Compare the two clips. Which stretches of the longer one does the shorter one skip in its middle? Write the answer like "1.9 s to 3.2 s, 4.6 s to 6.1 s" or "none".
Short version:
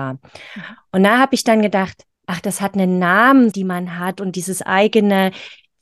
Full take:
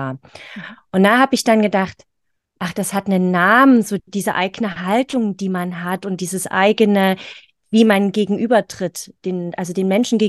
2.2 s to 2.5 s, 3.8 s to 5.4 s